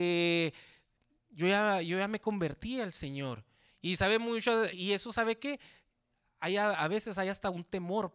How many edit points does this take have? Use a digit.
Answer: 1